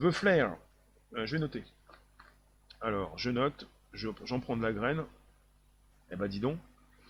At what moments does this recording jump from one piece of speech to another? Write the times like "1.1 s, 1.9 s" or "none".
5.9 s